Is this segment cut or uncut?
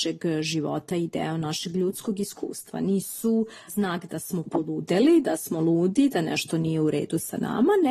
uncut